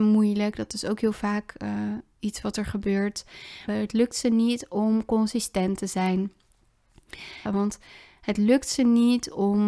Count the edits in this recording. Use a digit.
2